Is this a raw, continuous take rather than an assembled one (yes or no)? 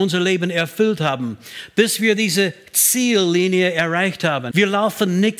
no